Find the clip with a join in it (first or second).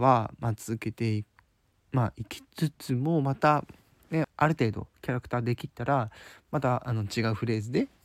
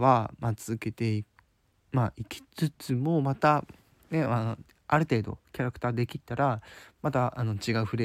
first